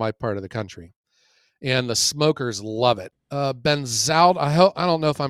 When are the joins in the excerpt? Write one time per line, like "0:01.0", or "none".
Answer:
0:03.1